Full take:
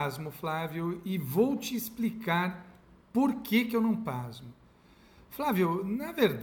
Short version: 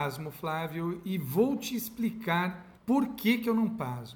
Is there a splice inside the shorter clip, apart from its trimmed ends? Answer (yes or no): yes